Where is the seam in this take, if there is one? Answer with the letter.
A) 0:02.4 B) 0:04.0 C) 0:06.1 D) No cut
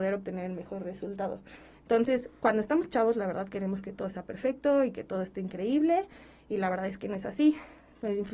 D